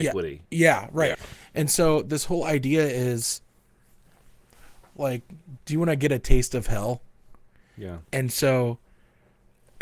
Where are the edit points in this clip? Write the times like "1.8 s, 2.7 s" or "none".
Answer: 1.1 s, 5.6 s, 7.6 s